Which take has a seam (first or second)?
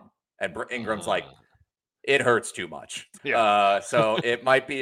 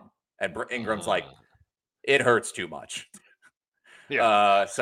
first